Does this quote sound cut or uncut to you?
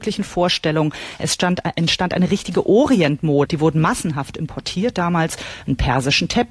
cut